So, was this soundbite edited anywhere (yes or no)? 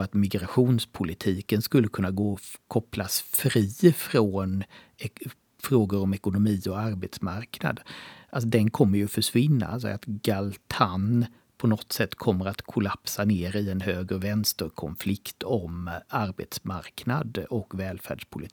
no